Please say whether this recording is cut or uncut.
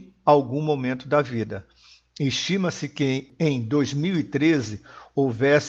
uncut